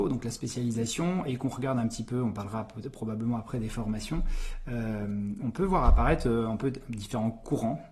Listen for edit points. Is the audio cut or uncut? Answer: uncut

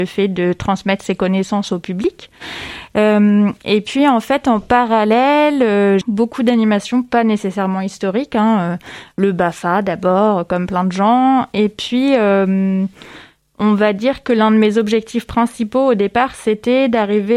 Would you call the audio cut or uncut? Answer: cut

